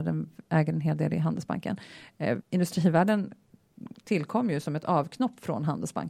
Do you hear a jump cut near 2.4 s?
yes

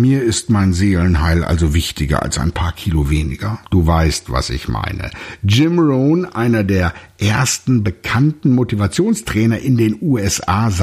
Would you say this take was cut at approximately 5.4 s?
no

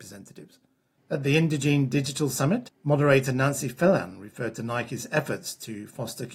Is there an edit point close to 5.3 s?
no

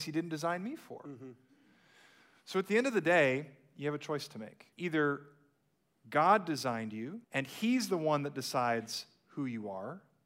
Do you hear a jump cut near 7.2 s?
yes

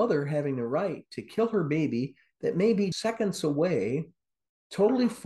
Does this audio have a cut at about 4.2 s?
no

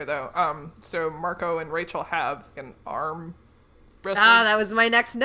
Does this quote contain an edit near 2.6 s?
yes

